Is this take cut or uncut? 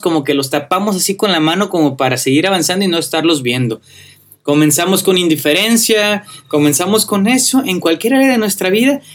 uncut